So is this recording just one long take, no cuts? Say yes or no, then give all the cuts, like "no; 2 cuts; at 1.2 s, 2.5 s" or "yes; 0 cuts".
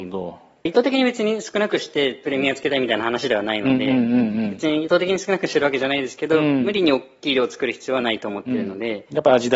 yes; 0 cuts